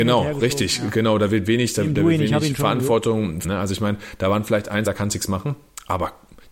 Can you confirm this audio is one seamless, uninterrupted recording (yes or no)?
no